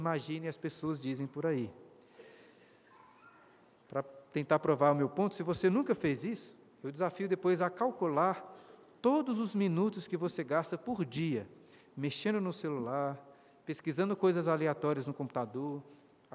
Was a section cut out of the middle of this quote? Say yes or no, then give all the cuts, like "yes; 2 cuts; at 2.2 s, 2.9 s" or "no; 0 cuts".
no; 0 cuts